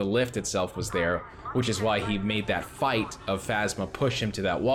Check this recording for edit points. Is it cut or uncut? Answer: uncut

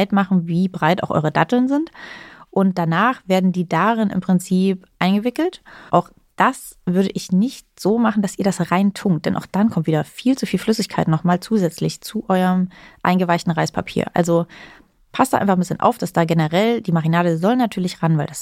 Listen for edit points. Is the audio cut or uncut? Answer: cut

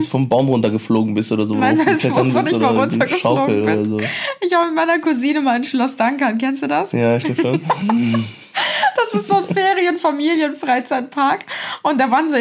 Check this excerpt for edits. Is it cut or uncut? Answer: uncut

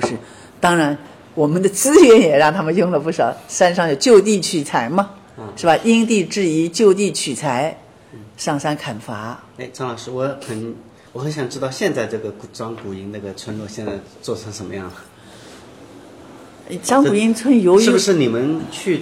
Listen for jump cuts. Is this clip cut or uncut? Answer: uncut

